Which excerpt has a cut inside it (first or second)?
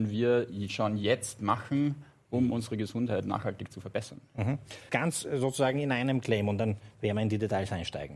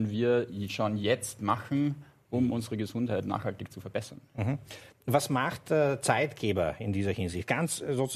first